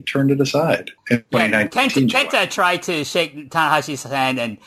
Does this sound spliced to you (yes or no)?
yes